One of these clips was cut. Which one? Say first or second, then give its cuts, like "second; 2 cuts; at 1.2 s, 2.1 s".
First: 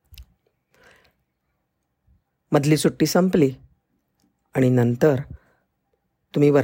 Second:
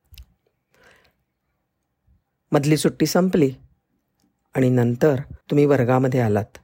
second; 1 cut; at 5.4 s